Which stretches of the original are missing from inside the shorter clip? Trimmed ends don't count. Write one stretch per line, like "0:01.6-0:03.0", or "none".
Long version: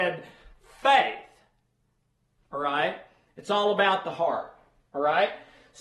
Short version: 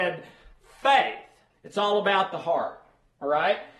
0:01.5-0:03.2